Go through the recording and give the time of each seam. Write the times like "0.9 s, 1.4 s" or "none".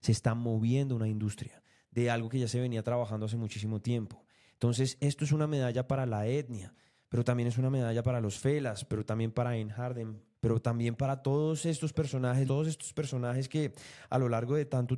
10.3 s, 12.5 s